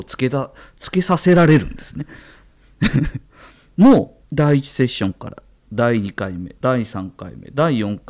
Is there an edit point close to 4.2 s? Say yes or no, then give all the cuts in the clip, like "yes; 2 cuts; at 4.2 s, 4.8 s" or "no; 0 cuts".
yes; 1 cut; at 4.2 s